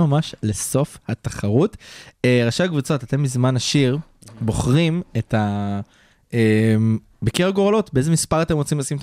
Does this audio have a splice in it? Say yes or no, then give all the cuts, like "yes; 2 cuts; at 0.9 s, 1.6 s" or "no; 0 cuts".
no; 0 cuts